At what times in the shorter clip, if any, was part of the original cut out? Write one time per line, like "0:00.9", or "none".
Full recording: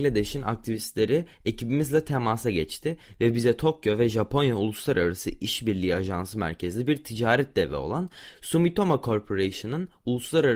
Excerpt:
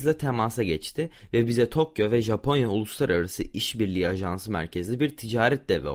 none